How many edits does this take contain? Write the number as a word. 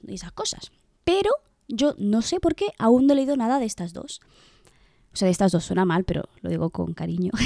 zero